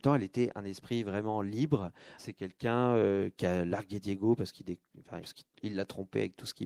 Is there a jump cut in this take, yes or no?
yes